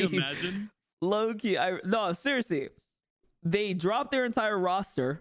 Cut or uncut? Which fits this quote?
uncut